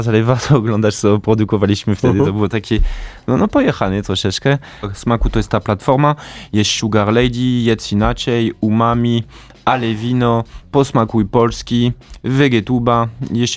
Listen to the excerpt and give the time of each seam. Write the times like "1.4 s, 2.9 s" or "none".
4.8 s, 6.5 s

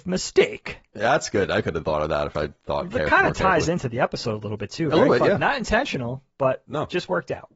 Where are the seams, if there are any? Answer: 1.6 s

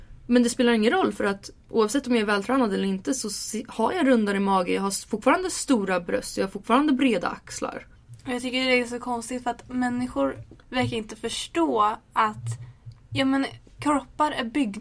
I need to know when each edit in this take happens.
10.6 s

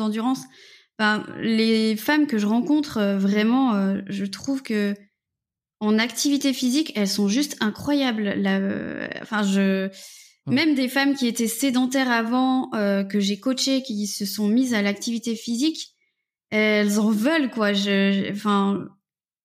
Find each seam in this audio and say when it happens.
none

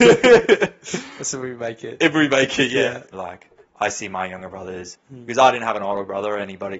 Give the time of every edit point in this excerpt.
3.1 s, 4.9 s

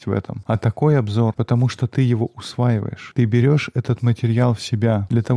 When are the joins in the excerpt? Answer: 1.4 s

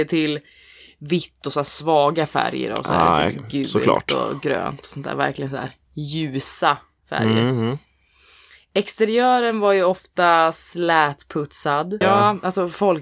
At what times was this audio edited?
12.0 s

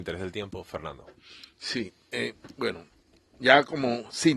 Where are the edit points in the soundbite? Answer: none

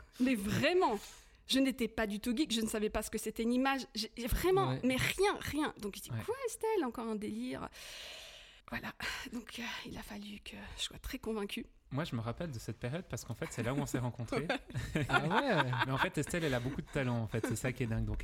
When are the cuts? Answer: 8.6 s

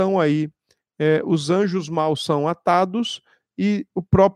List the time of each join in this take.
none

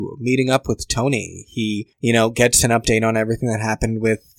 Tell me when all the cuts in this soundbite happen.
none

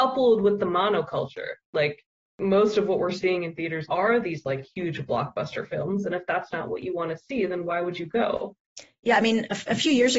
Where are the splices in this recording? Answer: 3.9 s

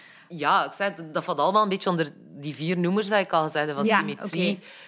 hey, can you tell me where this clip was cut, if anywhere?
none

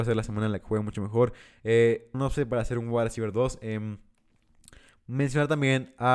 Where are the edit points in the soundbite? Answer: 2.1 s

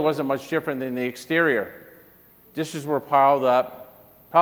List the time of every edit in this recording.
2.4 s

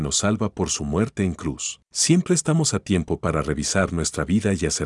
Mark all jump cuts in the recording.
1.9 s

